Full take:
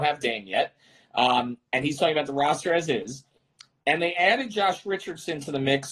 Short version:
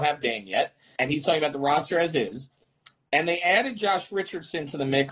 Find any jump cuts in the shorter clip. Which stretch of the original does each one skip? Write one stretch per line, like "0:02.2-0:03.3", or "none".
0:01.0-0:01.7